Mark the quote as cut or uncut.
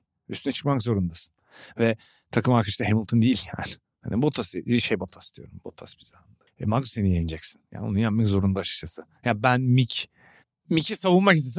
cut